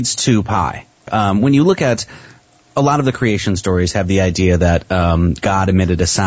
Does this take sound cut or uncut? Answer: cut